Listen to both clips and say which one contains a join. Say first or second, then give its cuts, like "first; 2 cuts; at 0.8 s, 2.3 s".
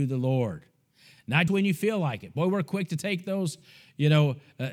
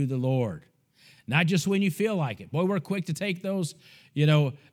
first; 1 cut; at 1.5 s